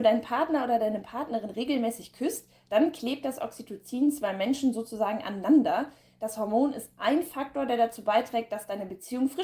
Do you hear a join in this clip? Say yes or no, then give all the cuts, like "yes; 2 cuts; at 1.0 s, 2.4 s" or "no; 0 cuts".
no; 0 cuts